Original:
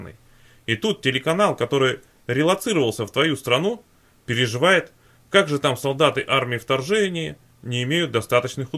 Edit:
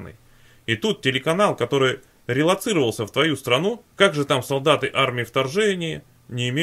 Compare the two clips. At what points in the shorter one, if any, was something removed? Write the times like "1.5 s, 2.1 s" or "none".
3.9 s